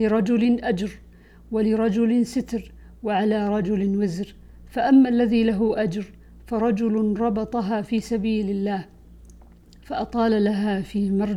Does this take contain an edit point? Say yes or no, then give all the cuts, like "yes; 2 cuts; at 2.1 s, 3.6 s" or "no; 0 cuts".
no; 0 cuts